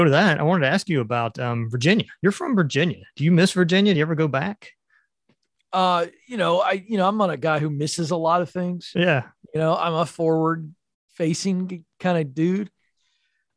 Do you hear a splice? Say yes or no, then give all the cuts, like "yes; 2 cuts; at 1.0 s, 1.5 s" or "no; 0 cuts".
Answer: no; 0 cuts